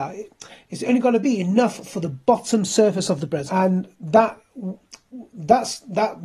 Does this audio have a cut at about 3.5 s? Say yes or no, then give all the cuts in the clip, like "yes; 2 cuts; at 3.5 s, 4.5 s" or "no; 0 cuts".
yes; 1 cut; at 3.5 s